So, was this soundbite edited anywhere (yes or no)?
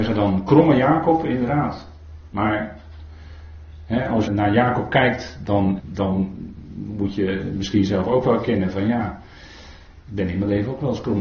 yes